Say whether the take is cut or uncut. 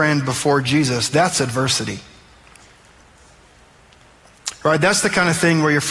uncut